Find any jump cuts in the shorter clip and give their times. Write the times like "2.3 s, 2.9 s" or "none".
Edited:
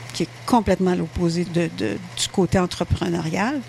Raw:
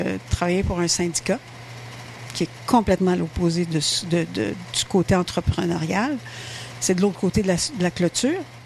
1.5 s